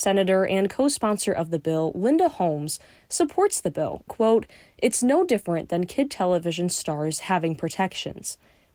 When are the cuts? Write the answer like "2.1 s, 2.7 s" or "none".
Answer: 4.1 s